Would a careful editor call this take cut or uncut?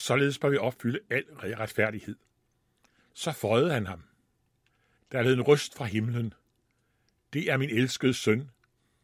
cut